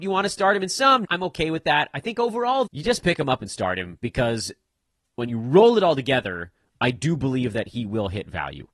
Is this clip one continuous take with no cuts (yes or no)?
no